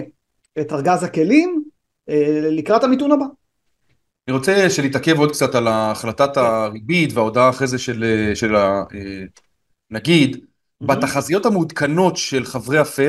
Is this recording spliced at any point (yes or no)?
no